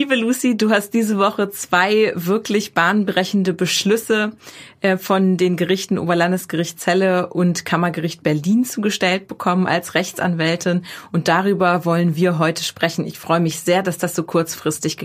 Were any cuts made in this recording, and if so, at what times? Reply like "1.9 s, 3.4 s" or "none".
none